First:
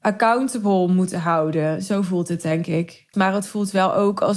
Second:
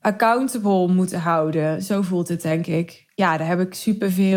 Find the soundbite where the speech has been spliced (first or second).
first